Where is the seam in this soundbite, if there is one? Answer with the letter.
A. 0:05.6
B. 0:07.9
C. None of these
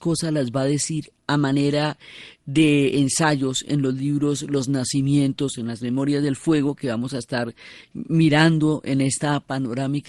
B